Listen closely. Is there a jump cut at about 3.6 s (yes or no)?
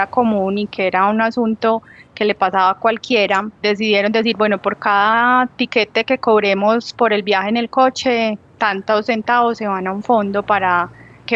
yes